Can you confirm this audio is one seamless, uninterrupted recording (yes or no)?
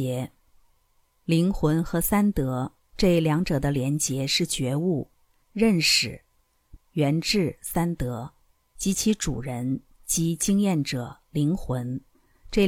no